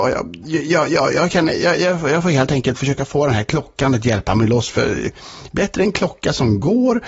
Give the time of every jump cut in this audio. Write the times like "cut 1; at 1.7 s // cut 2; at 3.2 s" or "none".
none